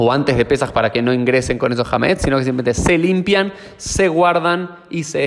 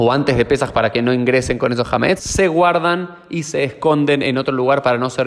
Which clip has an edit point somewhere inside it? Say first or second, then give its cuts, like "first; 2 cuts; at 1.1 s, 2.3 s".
second; 1 cut; at 2.2 s